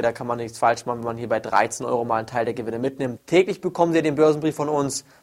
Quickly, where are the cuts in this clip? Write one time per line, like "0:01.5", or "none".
0:03.2

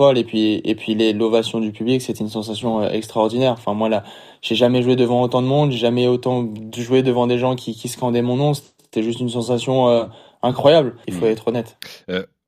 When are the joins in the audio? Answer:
0:11.0

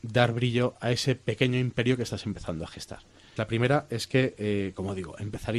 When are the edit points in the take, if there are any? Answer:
0:03.4

